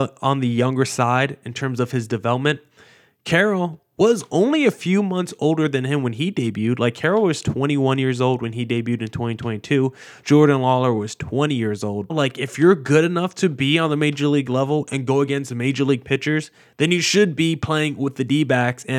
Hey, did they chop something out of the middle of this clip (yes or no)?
yes